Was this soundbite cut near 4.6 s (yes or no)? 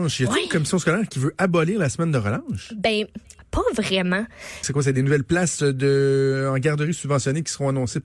yes